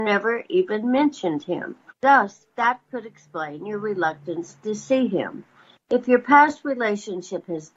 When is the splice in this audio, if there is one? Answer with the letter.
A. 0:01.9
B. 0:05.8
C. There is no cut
A